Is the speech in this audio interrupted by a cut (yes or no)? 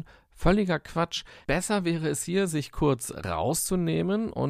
yes